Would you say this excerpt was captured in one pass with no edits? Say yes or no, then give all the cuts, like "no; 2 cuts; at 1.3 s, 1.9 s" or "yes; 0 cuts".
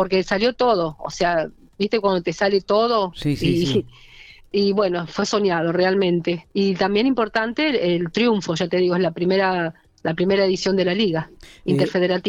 yes; 0 cuts